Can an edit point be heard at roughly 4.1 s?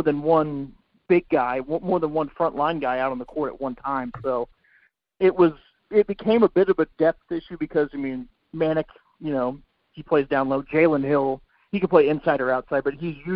no; 0 cuts

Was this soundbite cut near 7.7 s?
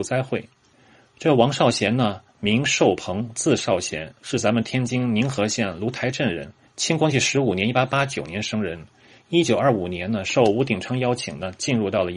no; 0 cuts

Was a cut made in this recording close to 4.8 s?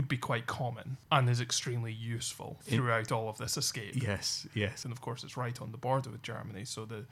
yes; 1 cut; at 4.8 s

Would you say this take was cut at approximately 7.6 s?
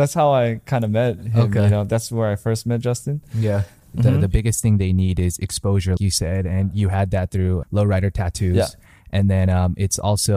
yes; 3 cuts; at 3.9 s, 6.0 s, 7.6 s

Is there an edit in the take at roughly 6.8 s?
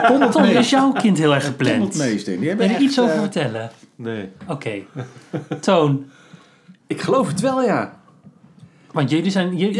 yes; 1 cut; at 6.8 s

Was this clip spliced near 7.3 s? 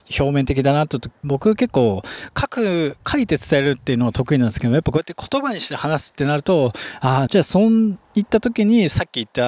yes; 2 cuts; at 1.2 s, 7.3 s

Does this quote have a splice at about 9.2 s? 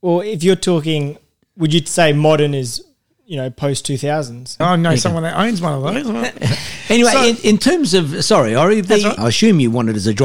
yes; 2 cuts; at 4.6 s, 9.2 s

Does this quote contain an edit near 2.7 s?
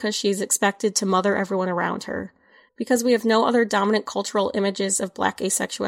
yes; 1 cut; at 2.7 s

